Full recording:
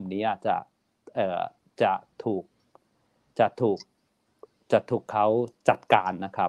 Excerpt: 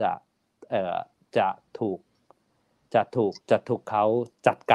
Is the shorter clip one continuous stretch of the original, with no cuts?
no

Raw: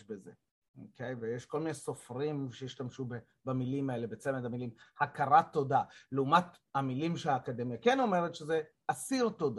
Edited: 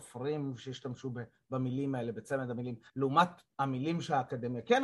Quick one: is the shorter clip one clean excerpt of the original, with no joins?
no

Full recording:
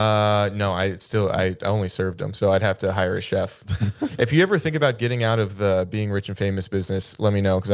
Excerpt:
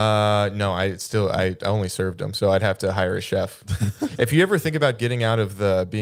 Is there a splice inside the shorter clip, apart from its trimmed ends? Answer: no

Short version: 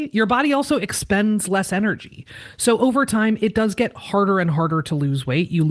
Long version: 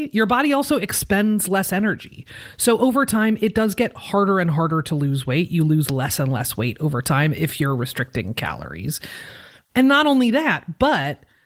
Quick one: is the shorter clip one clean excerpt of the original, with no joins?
yes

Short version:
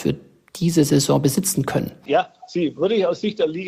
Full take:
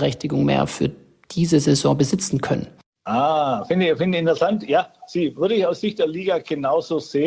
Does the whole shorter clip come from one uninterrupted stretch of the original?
no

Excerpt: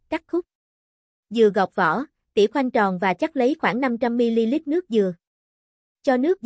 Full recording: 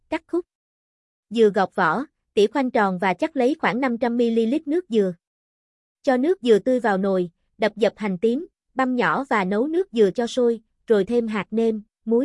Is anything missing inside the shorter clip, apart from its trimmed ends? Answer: no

